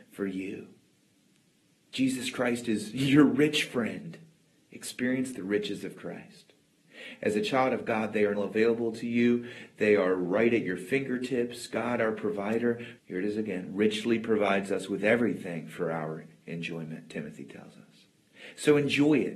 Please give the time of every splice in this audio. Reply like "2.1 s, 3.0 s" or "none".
8.3 s, 13.0 s